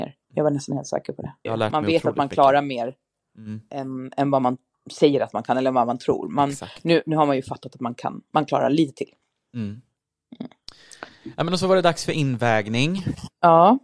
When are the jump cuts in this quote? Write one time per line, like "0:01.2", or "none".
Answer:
0:01.4